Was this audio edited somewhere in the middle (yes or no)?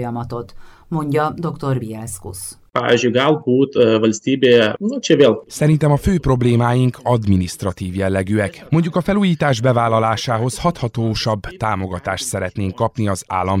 no